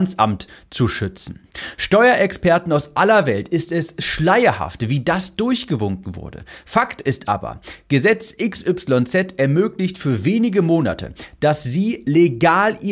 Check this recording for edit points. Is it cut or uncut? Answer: uncut